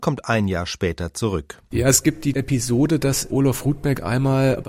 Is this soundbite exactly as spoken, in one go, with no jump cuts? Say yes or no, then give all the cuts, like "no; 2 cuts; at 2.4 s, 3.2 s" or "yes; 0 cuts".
no; 1 cut; at 1.7 s